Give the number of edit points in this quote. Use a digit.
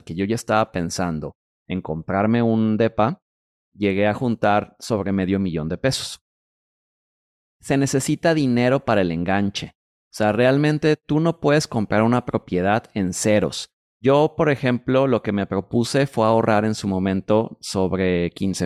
1